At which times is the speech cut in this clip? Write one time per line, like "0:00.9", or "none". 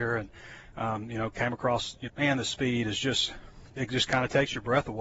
0:02.1